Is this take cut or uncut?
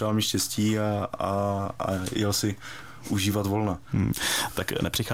uncut